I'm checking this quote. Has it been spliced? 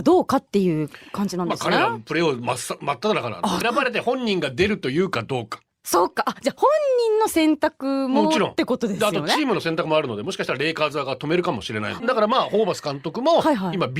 yes; 2 cuts; at 3.6 s, 12.0 s

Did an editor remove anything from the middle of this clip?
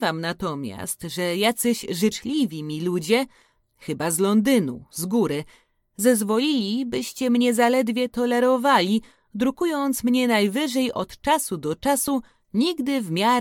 no; 0 cuts

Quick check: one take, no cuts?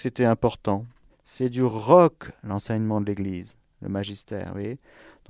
no; 1 cut; at 1.1 s

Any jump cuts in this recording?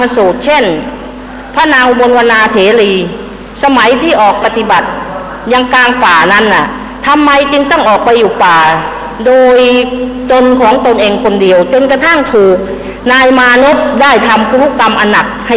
yes; 1 cut; at 4.4 s

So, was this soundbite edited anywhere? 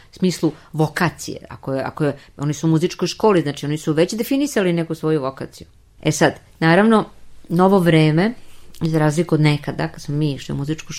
no; 0 cuts

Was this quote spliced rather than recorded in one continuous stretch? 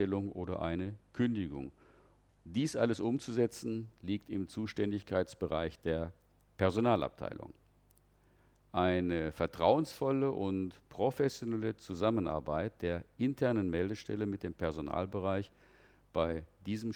no; 0 cuts

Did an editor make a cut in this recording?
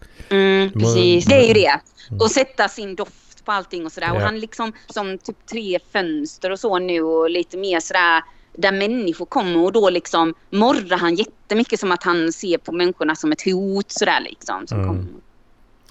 yes; 2 cuts; at 1.2 s, 4.9 s

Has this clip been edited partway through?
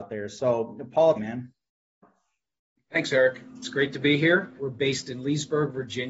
yes; 2 cuts; at 1.1 s, 4.6 s

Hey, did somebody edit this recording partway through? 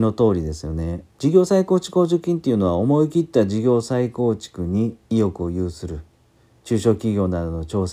yes; 1 cut; at 1.1 s

